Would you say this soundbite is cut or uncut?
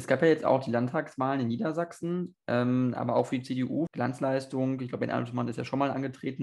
cut